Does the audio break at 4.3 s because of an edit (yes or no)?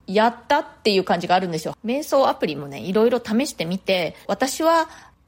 yes